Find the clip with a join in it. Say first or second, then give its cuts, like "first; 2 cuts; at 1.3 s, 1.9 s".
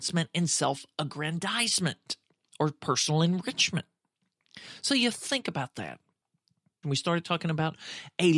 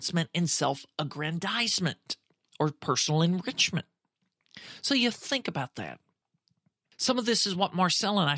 first; 1 cut; at 6.8 s